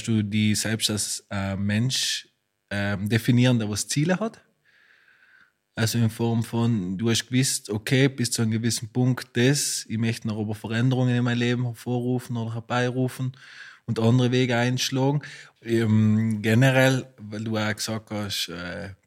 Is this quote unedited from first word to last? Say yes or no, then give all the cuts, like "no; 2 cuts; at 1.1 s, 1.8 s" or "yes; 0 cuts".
no; 1 cut; at 15.6 s